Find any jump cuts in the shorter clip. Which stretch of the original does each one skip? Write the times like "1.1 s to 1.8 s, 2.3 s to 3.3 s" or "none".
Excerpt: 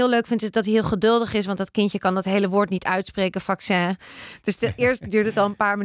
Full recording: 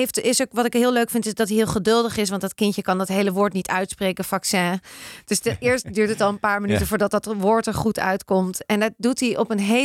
none